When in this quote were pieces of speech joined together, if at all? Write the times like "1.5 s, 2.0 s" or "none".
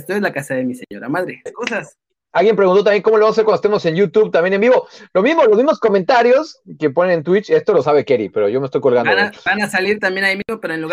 1.5 s